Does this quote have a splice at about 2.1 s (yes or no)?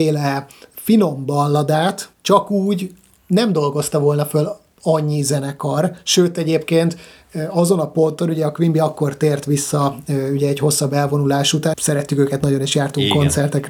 yes